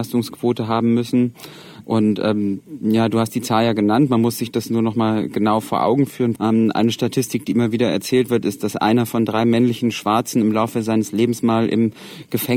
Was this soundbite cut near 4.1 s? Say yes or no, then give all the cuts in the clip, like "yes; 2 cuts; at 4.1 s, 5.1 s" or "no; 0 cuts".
no; 2 cuts; at 1.8 s, 6.4 s